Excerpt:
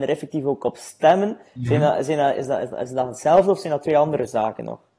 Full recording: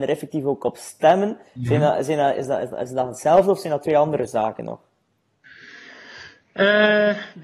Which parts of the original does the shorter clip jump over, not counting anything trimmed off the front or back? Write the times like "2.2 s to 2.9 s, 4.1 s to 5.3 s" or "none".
none